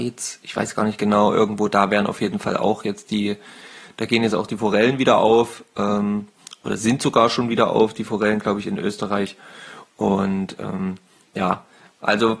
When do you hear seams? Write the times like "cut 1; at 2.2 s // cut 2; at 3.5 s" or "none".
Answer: none

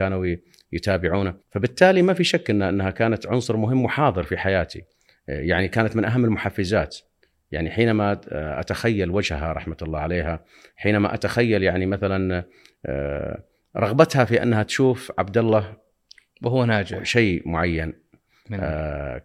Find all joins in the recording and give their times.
cut 1; at 1.4 s

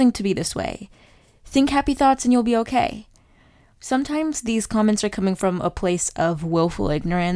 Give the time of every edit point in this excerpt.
none

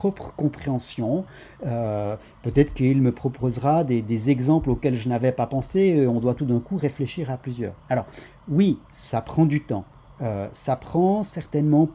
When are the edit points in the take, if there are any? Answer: none

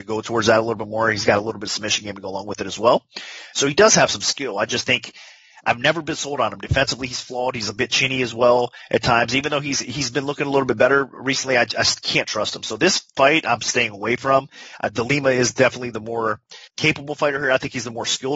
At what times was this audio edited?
cut 1; at 16.7 s

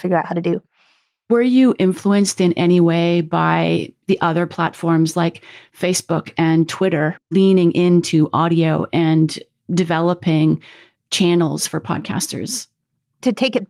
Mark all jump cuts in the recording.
cut 1; at 7.2 s

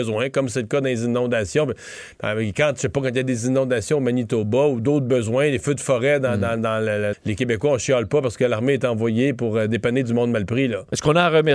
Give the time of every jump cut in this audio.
cut 1; at 7.1 s

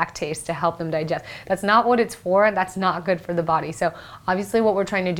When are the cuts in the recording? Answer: none

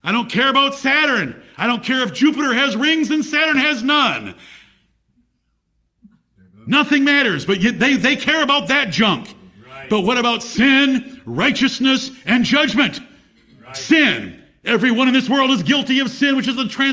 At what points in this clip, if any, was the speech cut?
none

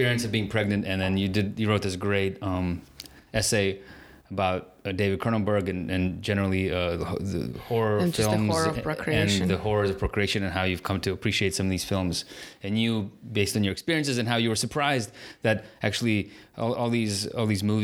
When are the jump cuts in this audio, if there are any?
none

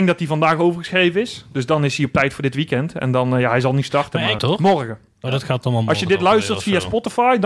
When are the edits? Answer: cut 1; at 4.4 s

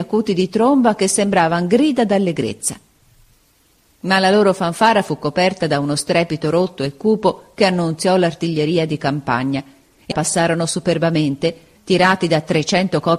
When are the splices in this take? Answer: cut 1; at 10.1 s // cut 2; at 11.8 s

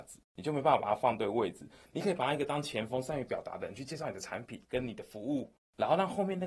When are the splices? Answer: none

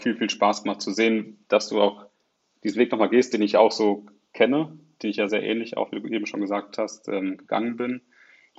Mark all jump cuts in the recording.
cut 1; at 5.3 s

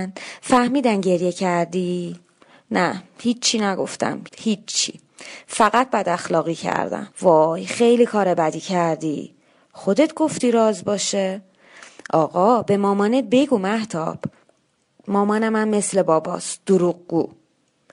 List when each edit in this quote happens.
cut 1; at 4.3 s // cut 2; at 7.1 s

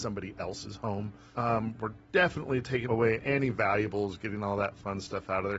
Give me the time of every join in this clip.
cut 1; at 1.3 s // cut 2; at 2.8 s

